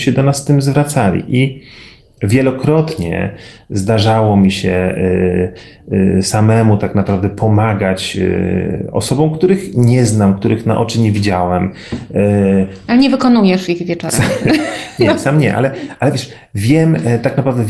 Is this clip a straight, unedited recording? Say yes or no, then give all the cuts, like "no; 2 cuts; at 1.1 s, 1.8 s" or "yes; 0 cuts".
no; 1 cut; at 12.9 s